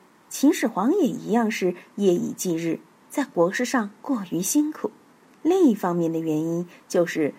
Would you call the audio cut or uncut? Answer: uncut